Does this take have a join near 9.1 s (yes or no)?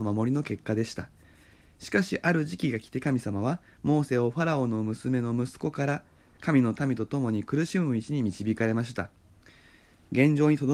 no